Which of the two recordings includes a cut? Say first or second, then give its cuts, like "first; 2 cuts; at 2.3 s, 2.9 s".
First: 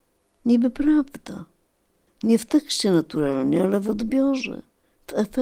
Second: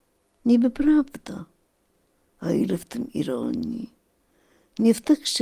first; 1 cut; at 2.1 s